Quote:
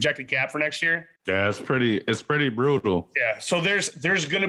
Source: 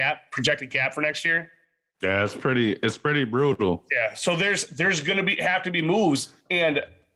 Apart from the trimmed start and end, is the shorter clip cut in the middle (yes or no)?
yes